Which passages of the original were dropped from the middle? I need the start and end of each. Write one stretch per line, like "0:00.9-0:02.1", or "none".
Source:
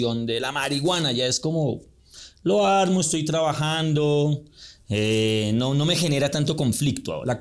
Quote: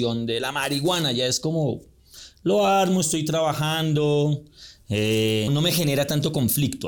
0:05.5-0:05.7

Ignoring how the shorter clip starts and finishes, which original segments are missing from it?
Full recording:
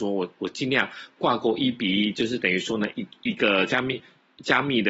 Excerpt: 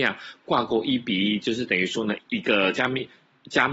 0:02.9-0:03.1

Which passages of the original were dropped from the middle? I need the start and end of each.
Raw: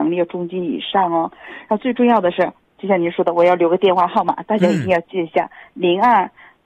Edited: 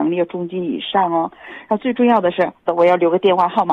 0:02.7-0:03.3

